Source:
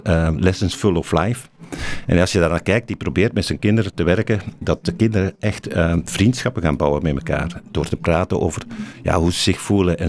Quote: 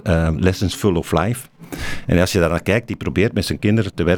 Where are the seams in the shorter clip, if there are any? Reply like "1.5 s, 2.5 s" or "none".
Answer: none